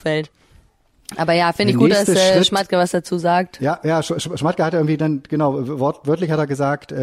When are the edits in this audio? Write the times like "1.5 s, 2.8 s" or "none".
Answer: none